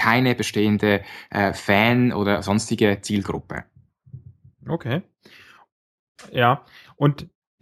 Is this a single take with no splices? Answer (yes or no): yes